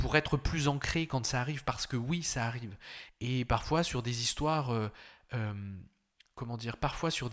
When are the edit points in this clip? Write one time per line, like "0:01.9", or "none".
0:03.1